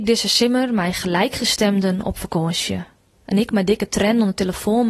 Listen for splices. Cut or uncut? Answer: cut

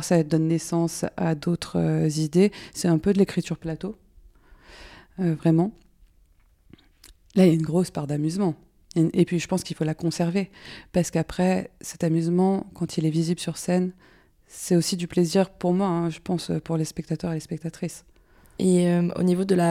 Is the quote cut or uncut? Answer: uncut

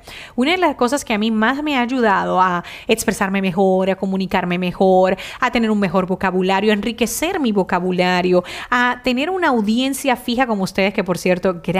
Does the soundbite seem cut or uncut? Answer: uncut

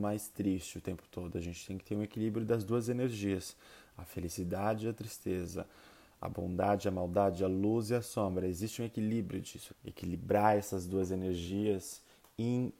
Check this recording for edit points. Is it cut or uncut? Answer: cut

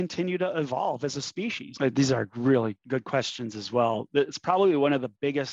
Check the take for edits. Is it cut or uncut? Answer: cut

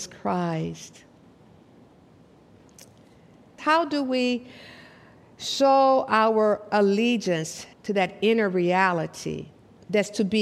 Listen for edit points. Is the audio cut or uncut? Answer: cut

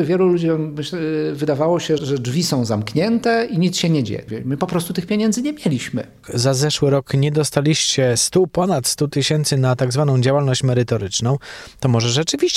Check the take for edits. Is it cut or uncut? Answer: cut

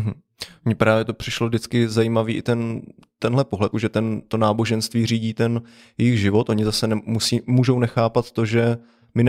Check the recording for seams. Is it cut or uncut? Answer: cut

